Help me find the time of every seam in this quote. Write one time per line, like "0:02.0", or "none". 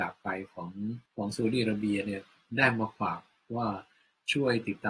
0:01.1